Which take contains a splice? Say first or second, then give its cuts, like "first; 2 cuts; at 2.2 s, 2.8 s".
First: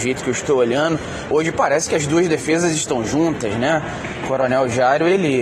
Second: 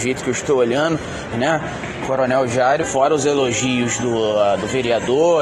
second; 2 cuts; at 1.3 s, 2.8 s